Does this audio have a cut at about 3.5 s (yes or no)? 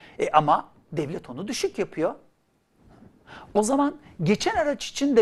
no